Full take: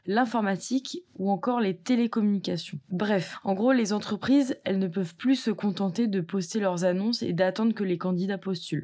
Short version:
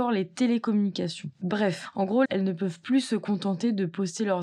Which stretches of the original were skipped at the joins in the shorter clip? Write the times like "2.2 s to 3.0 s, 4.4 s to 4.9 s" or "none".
3.7 s to 4.6 s